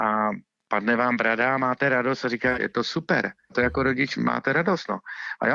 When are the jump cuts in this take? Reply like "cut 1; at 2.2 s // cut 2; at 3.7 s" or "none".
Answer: cut 1; at 2.5 s